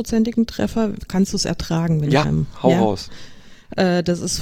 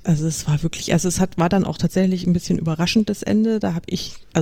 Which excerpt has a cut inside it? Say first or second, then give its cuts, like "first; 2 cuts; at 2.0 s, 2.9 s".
first; 2 cuts; at 1.1 s, 2.2 s